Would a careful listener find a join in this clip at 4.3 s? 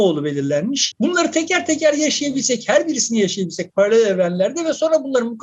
no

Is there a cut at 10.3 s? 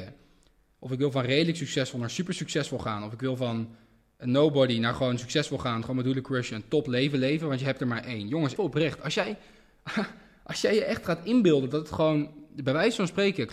no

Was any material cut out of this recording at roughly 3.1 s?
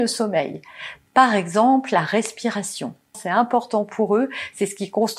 yes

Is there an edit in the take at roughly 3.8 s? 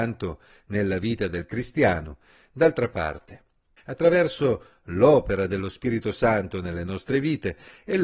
yes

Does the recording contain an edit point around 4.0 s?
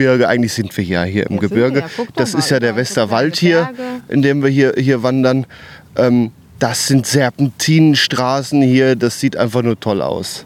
no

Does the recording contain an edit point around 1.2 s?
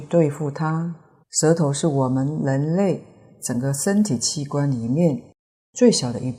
yes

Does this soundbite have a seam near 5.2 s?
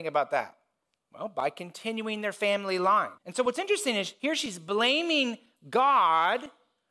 no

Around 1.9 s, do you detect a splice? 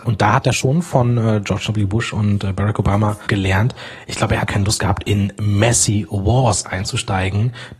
no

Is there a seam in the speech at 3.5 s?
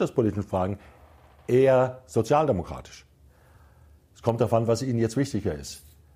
no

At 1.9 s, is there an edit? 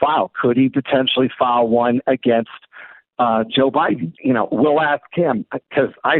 no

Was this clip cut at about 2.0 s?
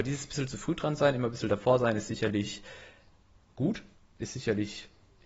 no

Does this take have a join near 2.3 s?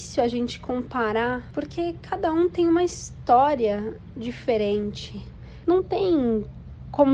no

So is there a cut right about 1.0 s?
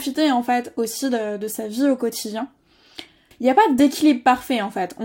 no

